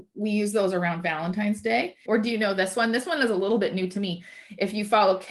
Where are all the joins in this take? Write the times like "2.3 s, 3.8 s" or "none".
2.1 s